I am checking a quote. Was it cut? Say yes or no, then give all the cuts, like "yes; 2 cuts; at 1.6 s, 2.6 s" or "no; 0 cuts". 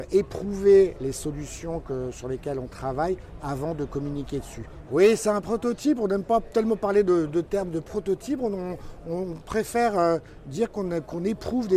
yes; 1 cut; at 4.9 s